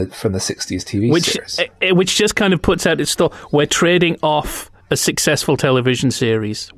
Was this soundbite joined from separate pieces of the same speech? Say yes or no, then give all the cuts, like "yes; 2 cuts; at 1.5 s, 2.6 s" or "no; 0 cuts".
no; 0 cuts